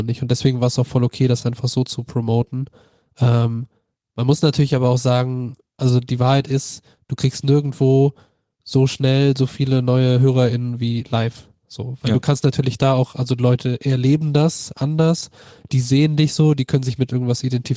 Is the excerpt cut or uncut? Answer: uncut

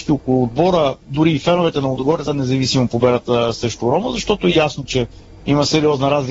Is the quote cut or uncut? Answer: cut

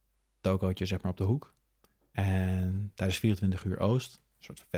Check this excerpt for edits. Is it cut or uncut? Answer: uncut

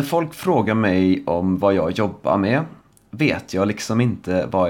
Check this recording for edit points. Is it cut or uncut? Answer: uncut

